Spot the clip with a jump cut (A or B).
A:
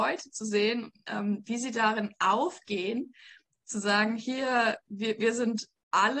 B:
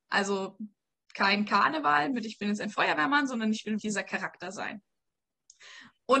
B